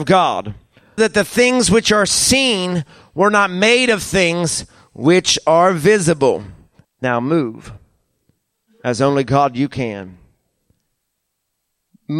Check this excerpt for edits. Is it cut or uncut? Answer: cut